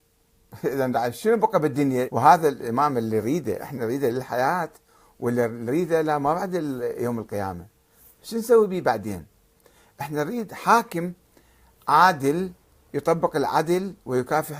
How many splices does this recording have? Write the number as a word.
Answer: one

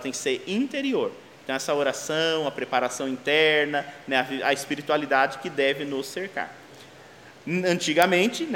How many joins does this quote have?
zero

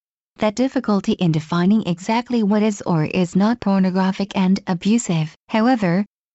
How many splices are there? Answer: one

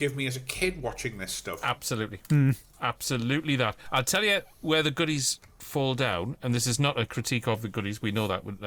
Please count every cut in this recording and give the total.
zero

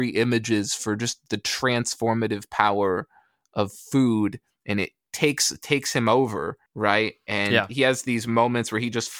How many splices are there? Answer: one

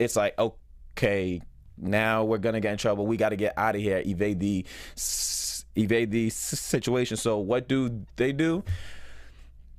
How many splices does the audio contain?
zero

